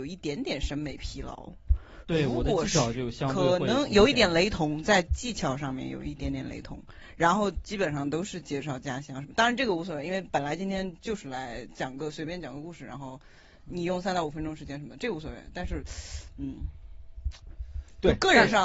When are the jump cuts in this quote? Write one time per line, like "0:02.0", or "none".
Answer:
none